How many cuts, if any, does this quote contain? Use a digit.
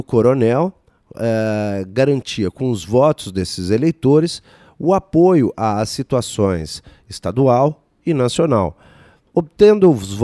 0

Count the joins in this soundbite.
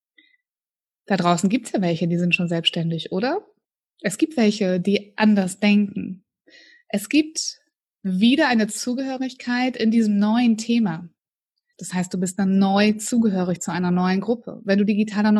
1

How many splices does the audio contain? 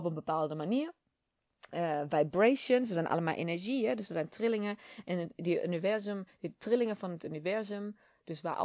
0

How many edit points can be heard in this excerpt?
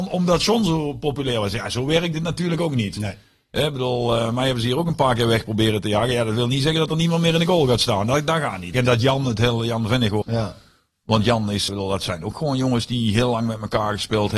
3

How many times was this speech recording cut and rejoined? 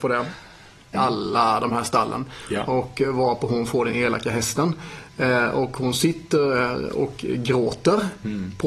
1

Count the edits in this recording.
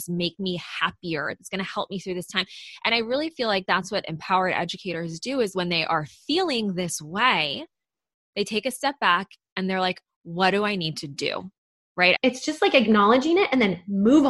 2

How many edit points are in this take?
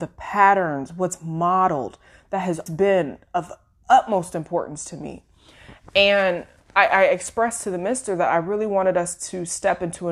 1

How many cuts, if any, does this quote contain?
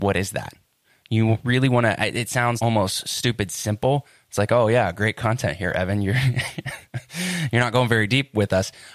1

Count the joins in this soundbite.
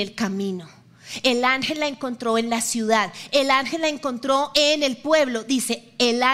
0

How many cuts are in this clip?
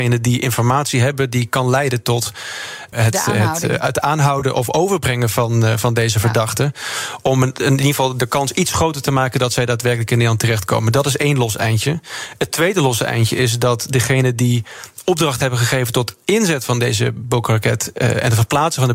1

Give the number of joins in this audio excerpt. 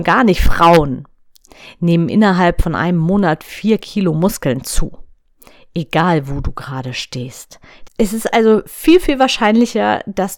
1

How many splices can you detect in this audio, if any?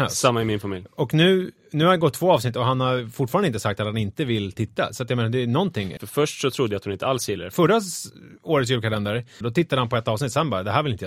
3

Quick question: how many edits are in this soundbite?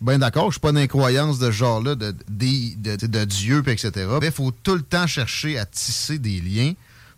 2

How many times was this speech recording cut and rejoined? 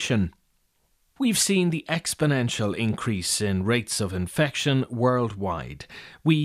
0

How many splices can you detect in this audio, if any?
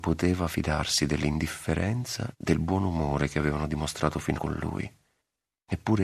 2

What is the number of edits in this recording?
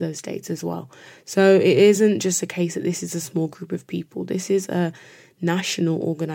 0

